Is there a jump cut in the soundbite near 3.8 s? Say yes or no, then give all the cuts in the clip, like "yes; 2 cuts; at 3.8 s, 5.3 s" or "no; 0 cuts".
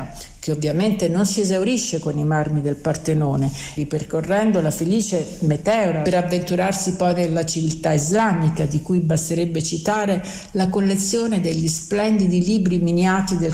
yes; 2 cuts; at 3.8 s, 6.0 s